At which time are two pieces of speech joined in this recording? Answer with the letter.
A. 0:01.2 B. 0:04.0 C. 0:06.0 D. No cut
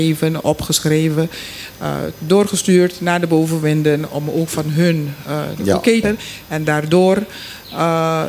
C